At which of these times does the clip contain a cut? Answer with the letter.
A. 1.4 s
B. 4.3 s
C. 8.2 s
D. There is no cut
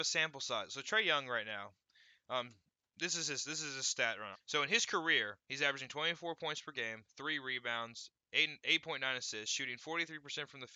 B